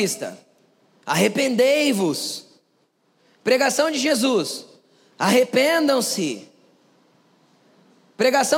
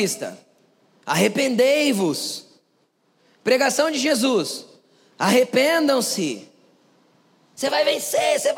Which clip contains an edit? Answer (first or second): second